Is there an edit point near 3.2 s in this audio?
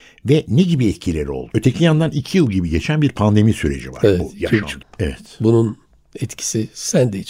no; 2 cuts; at 1.5 s, 4.8 s

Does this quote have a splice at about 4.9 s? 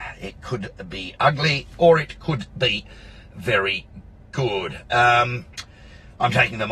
no; 1 cut; at 1.2 s

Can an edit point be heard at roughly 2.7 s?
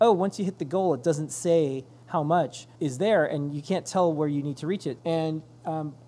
yes; 2 cuts; at 2.7 s, 5.0 s

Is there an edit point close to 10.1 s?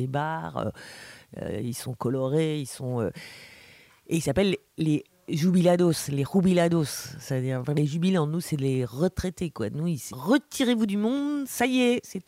yes; 1 cut; at 10.1 s

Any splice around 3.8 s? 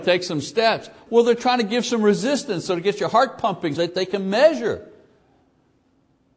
yes; 2 cuts; at 1.1 s, 3.8 s

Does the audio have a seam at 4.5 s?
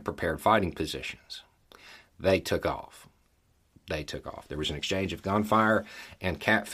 no; 0 cuts

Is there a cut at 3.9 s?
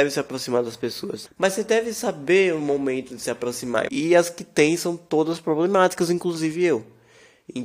yes; 2 cuts; at 1.3 s, 3.9 s

